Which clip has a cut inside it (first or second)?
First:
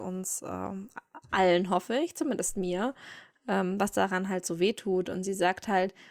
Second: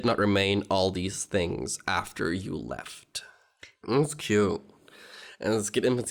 second